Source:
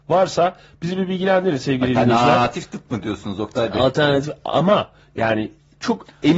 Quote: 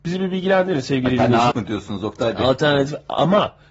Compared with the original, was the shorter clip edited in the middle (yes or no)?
yes